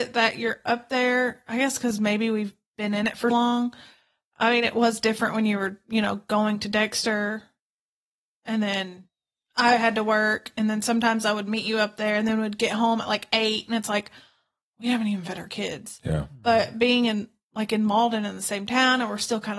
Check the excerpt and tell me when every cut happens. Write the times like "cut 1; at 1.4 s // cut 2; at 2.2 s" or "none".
cut 1; at 3.3 s

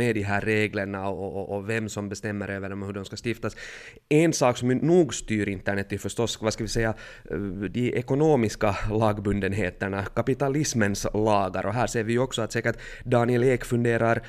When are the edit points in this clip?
none

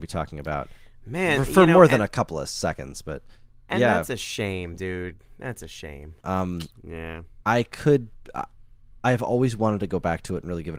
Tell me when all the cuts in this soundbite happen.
cut 1; at 6.2 s

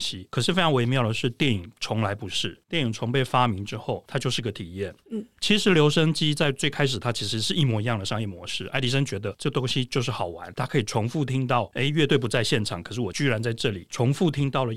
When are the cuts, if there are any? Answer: cut 1; at 5.0 s

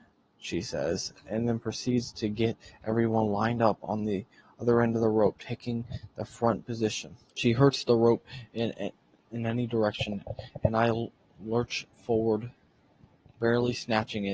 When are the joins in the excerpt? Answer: cut 1; at 7.3 s

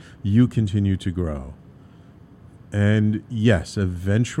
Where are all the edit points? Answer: none

